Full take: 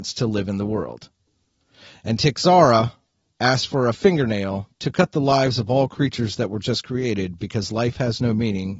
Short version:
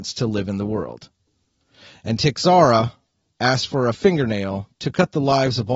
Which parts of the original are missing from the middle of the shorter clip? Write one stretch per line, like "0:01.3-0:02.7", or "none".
none